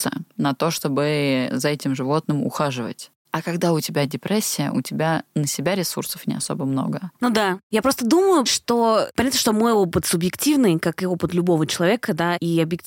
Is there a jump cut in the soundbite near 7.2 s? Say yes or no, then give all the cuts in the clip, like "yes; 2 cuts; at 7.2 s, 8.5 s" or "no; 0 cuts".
yes; 1 cut; at 7.2 s